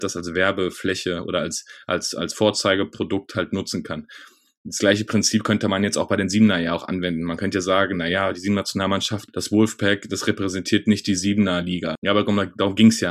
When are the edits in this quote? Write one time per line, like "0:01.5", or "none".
0:09.3
0:12.0